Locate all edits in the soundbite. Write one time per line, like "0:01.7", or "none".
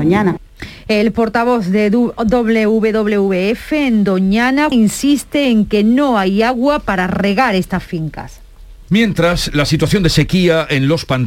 0:04.7
0:08.9